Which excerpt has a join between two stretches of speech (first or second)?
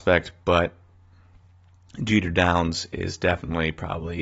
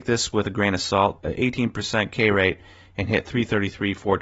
second